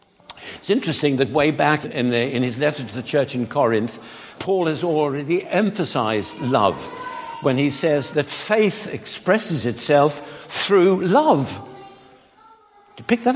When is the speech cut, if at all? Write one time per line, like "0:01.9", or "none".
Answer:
0:01.8
0:04.3
0:08.1